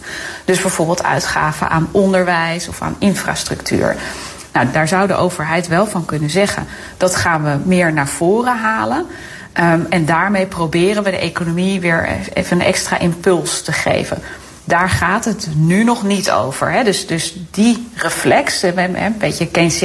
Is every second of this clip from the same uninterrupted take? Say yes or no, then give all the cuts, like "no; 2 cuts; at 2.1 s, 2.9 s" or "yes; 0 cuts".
no; 1 cut; at 4.7 s